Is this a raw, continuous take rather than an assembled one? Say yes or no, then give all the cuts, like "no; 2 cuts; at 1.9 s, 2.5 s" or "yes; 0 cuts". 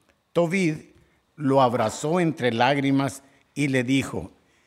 no; 1 cut; at 1.3 s